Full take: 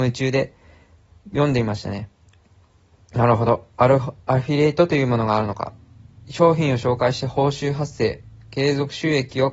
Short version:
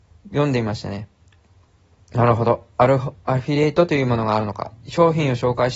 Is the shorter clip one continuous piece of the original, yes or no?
no